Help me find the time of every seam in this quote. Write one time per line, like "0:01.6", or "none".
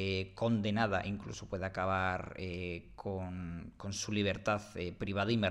none